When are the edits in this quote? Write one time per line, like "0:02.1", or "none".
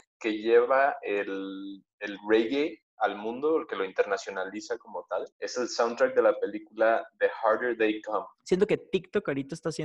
0:05.3
0:08.4